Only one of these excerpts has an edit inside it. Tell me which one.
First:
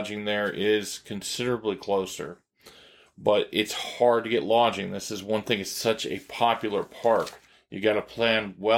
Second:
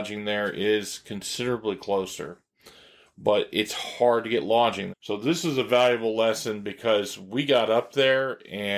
second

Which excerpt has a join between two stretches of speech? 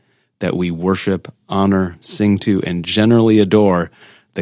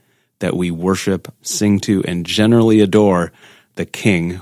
second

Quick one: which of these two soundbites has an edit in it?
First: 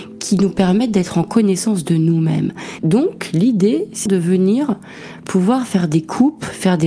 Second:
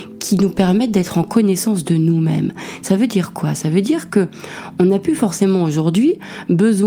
first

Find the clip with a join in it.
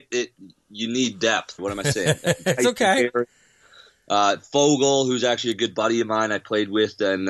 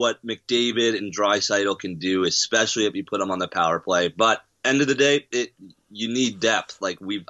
first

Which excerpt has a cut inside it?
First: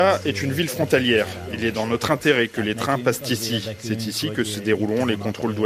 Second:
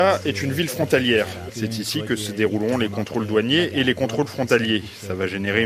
second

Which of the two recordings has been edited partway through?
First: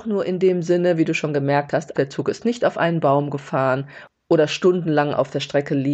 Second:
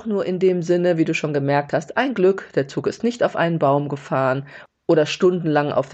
first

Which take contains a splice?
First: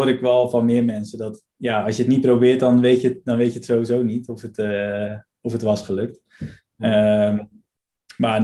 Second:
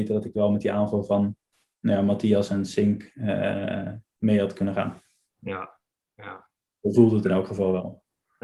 first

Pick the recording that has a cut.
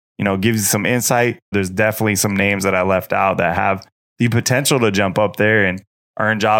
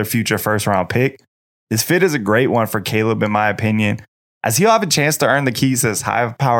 first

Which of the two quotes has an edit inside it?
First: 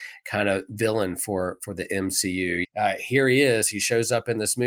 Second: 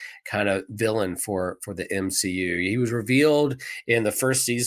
first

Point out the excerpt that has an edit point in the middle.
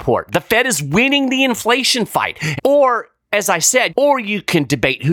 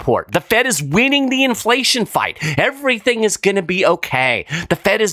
first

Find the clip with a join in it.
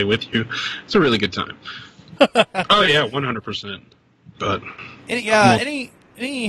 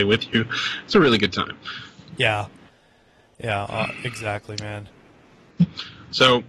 first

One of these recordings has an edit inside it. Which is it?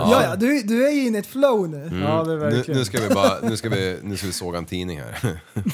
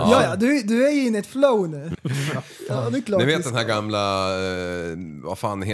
second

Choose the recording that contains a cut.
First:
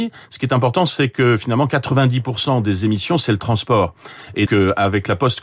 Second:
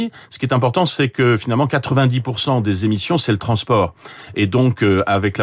first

